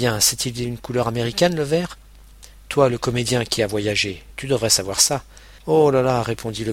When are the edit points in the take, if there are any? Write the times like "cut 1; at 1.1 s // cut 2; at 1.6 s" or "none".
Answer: cut 1; at 5.6 s